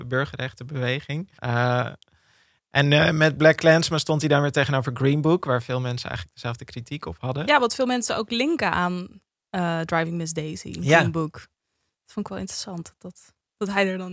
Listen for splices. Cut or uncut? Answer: cut